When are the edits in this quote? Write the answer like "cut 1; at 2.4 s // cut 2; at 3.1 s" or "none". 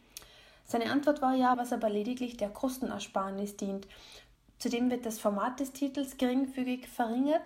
cut 1; at 1.5 s